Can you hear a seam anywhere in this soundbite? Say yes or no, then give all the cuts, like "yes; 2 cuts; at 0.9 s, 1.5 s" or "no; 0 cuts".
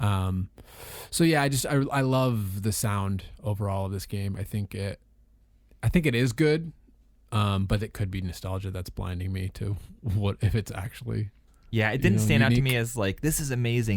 no; 0 cuts